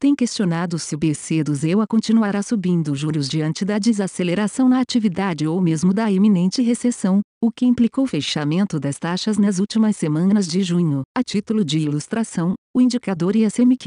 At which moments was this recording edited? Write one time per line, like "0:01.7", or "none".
0:11.1